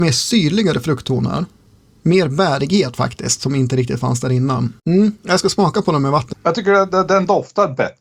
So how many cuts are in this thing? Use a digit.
2